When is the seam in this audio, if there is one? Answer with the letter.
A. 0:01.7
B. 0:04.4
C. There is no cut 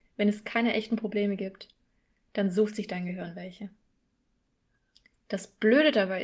C